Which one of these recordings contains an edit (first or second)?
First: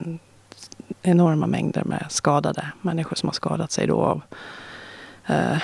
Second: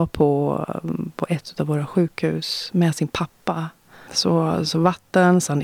second